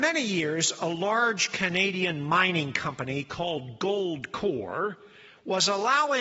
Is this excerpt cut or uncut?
uncut